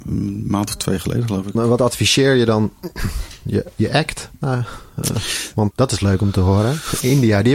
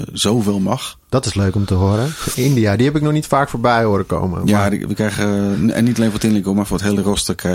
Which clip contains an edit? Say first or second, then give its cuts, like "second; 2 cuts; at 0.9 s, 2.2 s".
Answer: first; 2 cuts; at 1.5 s, 5.7 s